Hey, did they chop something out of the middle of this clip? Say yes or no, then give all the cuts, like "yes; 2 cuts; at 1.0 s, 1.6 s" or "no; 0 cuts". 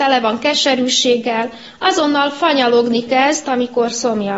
yes; 1 cut; at 3.4 s